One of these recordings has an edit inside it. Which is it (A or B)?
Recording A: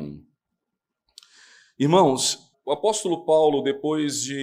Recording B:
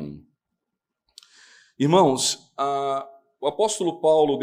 A